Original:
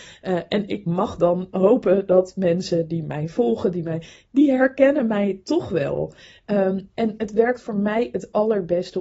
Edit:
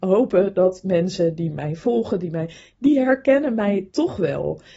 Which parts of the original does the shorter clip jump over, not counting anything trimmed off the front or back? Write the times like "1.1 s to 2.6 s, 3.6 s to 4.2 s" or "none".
none

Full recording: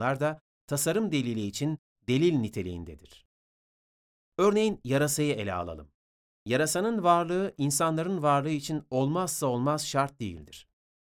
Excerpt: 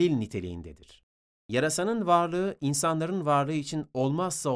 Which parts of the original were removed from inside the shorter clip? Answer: 3.5 s to 6.3 s

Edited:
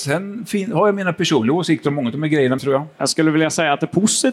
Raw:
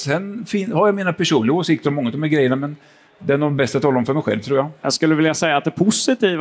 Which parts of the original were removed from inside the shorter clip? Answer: 2.6 s to 4.4 s

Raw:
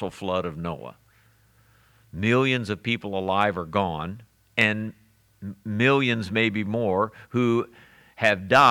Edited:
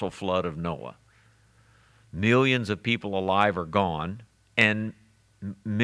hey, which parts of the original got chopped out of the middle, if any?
none

